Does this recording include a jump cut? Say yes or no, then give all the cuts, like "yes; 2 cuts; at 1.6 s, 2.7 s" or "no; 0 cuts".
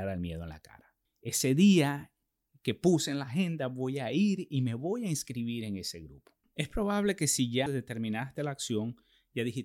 yes; 3 cuts; at 1.0 s, 6.4 s, 7.7 s